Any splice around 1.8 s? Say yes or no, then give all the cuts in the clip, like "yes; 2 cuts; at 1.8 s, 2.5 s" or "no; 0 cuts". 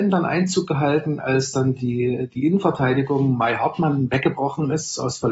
no; 0 cuts